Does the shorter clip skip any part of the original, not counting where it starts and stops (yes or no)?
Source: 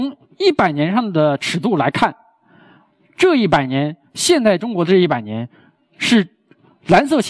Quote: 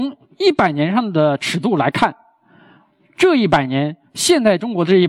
no